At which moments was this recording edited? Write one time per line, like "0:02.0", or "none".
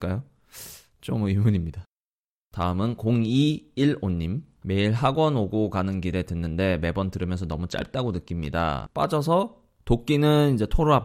0:04.6
0:08.9